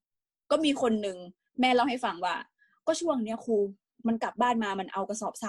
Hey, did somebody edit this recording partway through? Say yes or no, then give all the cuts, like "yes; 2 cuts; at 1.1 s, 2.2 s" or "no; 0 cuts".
yes; 1 cut; at 4.3 s